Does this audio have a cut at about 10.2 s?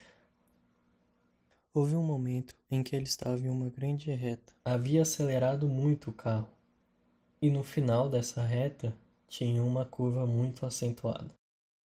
no; 1 cut; at 4.6 s

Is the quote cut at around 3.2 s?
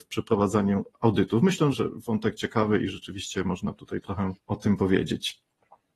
no; 2 cuts; at 1.7 s, 4.4 s

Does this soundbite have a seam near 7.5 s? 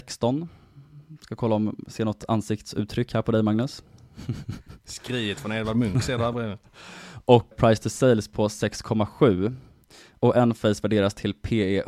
yes; 1 cut; at 7.5 s

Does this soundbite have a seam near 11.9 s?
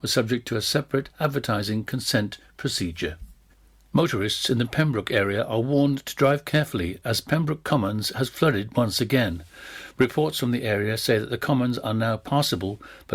no; 0 cuts

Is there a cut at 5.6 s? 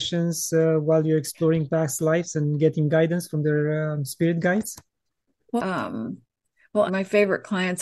yes; 2 cuts; at 5.6 s, 6.9 s

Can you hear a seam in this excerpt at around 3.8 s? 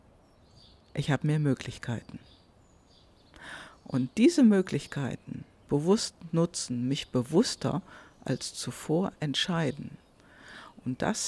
no; 1 cut; at 5.7 s

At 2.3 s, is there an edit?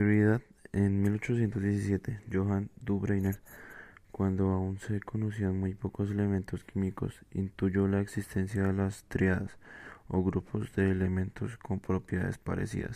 no; 0 cuts

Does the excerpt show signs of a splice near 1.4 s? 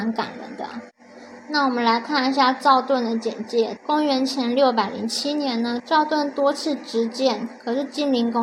no; 2 cuts; at 3.8 s, 5.8 s

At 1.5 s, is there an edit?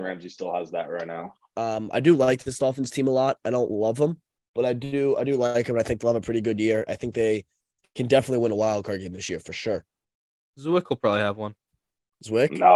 yes; 3 cuts; at 1.5 s, 6.9 s, 10.4 s

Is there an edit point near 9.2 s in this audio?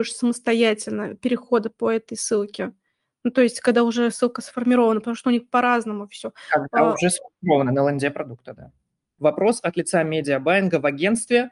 yes; 1 cut; at 9.2 s

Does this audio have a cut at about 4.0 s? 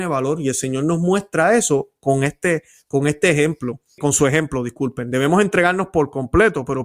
yes; 1 cut; at 4.0 s

